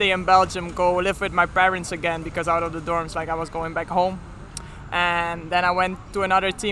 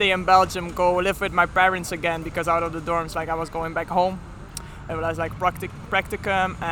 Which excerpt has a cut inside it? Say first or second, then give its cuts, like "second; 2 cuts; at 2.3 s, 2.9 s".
second; 1 cut; at 4.9 s